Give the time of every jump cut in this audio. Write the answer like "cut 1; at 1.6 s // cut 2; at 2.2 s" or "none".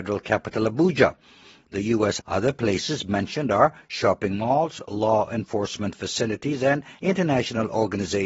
cut 1; at 2.2 s